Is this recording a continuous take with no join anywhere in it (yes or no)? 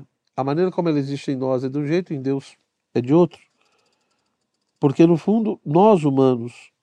yes